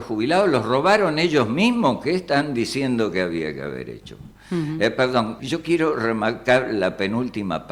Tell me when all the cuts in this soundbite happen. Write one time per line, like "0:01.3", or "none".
0:05.4